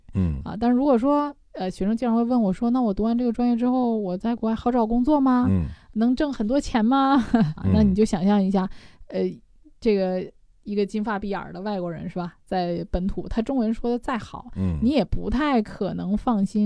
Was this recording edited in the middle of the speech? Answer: yes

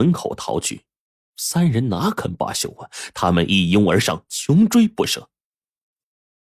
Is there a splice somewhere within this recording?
no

